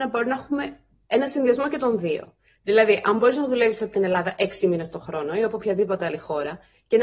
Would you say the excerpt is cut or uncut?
uncut